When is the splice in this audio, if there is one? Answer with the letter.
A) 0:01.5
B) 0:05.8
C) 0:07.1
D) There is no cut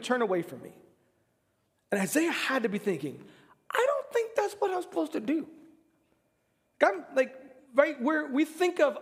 D